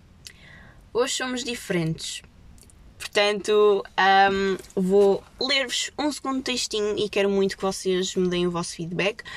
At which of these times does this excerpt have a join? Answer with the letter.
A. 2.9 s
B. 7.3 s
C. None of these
A